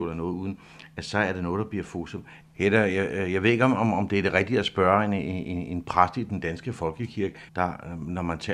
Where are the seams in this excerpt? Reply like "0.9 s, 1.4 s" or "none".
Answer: 2.4 s, 7.5 s